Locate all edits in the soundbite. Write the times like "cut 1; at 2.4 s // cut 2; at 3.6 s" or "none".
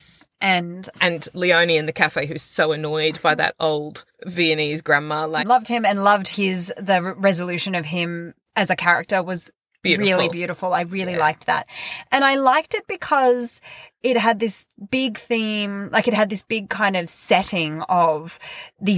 cut 1; at 5.4 s